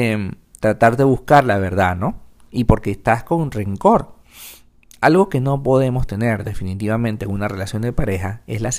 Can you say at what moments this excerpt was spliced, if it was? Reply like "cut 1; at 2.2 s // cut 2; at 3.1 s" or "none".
none